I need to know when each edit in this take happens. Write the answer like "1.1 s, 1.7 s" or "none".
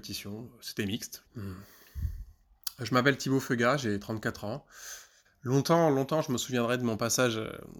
1.3 s, 5.2 s